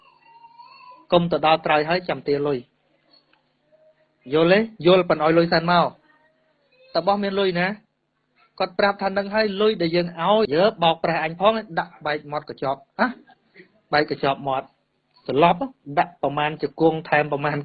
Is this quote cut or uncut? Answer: cut